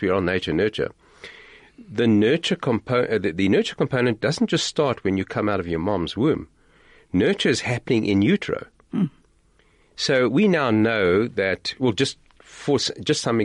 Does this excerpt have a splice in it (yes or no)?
no